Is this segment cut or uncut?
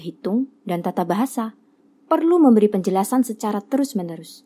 cut